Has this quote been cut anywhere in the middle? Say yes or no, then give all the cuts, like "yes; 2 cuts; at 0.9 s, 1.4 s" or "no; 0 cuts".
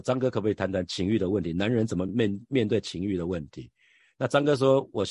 no; 0 cuts